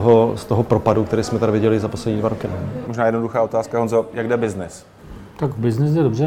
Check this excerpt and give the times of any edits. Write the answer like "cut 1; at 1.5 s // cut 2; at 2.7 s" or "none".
none

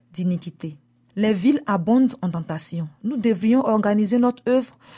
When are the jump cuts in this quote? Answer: none

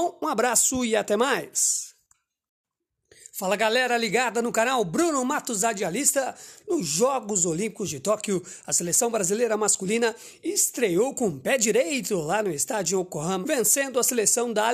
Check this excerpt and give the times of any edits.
cut 1; at 6.6 s // cut 2; at 13.4 s

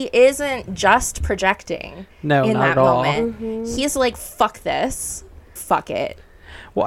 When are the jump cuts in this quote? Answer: cut 1; at 5.6 s

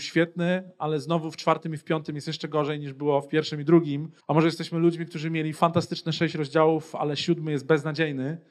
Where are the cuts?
cut 1; at 4.2 s

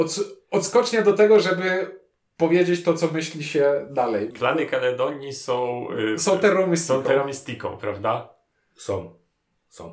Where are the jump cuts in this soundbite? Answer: cut 1; at 4.3 s

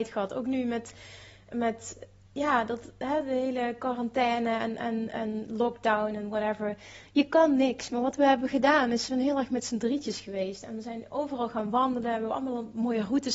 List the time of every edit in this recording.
none

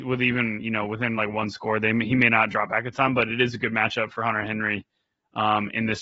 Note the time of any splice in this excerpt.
none

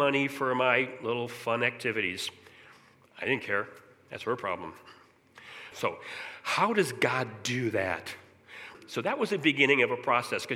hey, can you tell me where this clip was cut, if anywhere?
cut 1; at 5.7 s // cut 2; at 8.7 s

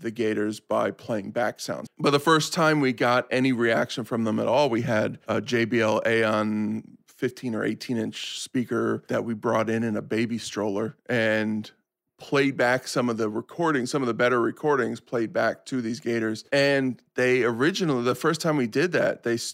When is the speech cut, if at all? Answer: cut 1; at 1.9 s

